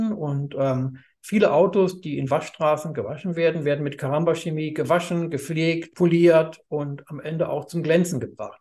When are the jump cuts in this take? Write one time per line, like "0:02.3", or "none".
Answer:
0:05.9